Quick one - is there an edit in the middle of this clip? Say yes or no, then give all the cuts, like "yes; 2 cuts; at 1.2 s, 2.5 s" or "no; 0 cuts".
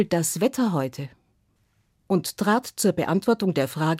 no; 0 cuts